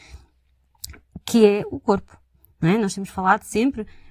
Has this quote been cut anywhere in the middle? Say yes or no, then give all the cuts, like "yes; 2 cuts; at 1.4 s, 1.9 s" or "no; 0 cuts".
no; 0 cuts